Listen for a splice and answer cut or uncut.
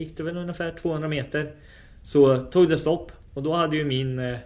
uncut